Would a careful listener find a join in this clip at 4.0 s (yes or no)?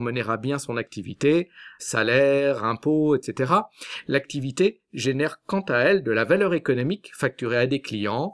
no